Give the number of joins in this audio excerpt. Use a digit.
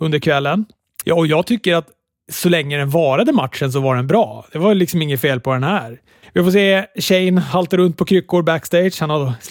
2